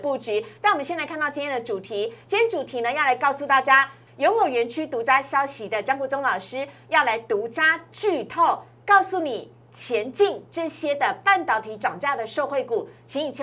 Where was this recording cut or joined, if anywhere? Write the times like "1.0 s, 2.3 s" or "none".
4.1 s